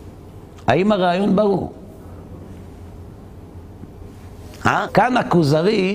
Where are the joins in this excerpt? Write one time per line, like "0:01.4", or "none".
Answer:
0:04.9